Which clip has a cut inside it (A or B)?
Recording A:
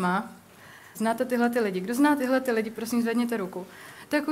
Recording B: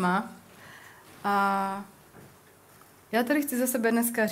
A